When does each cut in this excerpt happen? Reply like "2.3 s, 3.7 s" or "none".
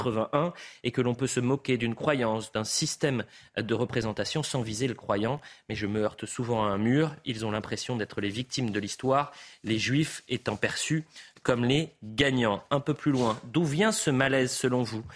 none